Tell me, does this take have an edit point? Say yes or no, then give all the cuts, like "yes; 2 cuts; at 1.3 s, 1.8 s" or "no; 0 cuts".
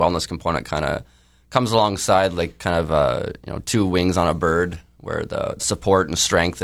yes; 1 cut; at 5.6 s